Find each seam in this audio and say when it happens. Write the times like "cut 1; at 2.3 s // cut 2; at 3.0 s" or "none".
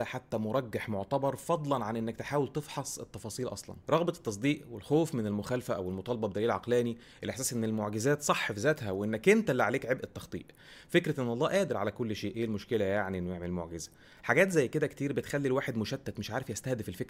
cut 1; at 3.8 s

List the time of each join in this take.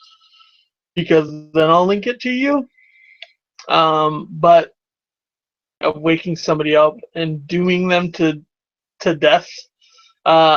none

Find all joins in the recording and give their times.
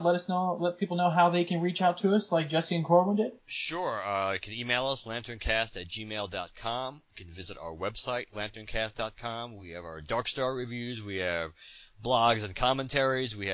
none

